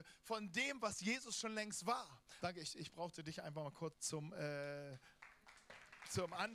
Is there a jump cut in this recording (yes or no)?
yes